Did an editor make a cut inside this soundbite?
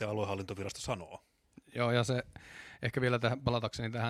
no; 0 cuts

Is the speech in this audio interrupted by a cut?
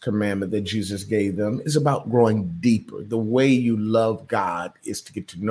no; 0 cuts

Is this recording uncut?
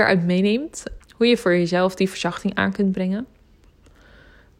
no; 1 cut; at 1.0 s

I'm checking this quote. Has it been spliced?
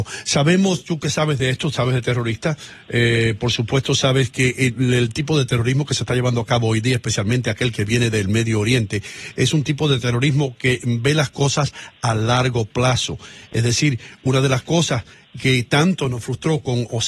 no; 0 cuts

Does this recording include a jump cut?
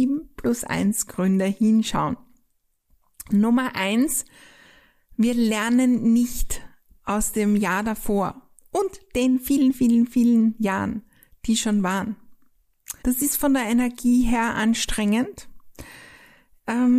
yes; 2 cuts; at 9.7 s, 13.0 s

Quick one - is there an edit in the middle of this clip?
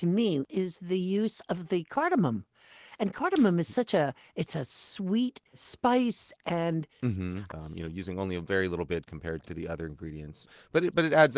yes; 2 cuts; at 7.5 s, 9.4 s

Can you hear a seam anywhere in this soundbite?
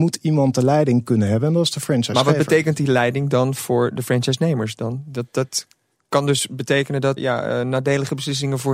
yes; 1 cut; at 7.2 s

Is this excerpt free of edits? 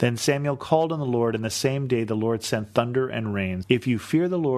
no; 1 cut; at 3.6 s

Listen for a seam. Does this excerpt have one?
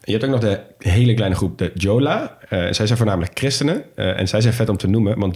no; 0 cuts

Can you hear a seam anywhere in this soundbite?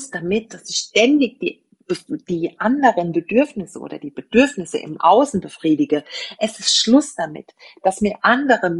no; 0 cuts

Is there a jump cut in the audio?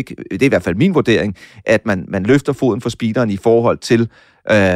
no; 0 cuts

